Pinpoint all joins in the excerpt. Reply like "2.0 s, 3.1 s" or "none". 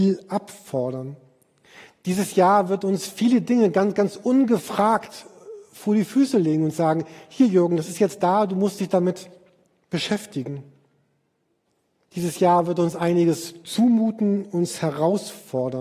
none